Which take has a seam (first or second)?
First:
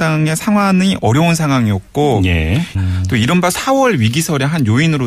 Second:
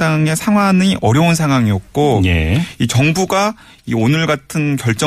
first